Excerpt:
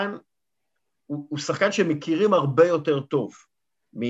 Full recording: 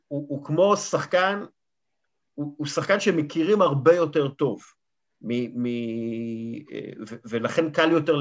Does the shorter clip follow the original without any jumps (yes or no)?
yes